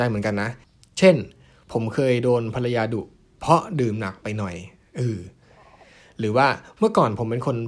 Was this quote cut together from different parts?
no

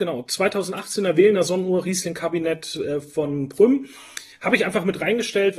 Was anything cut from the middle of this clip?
no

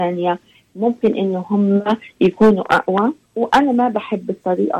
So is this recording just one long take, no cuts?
no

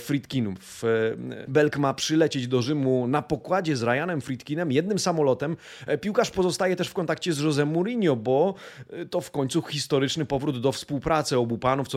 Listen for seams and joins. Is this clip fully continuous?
no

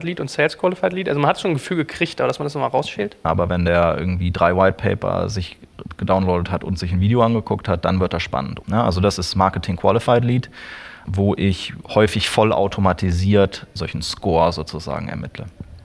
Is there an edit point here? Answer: yes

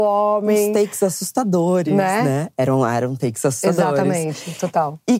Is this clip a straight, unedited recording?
yes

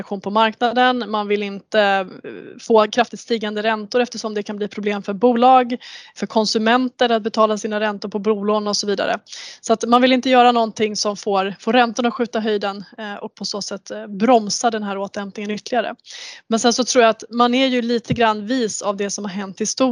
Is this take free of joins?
no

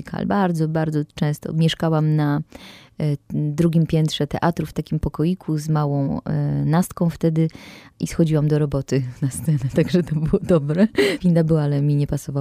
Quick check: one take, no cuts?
no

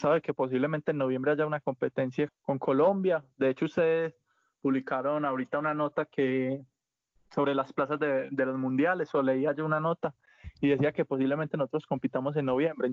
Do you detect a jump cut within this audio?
yes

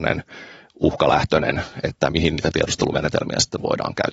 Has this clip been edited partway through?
no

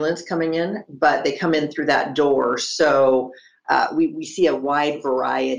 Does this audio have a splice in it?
no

